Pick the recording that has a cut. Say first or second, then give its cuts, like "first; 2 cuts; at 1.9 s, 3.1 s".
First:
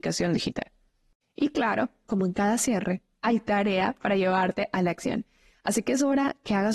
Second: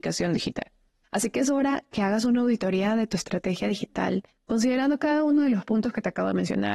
second; 1 cut; at 1.0 s